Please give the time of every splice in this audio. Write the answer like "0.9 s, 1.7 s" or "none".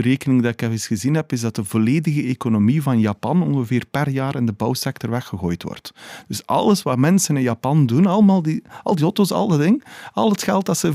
none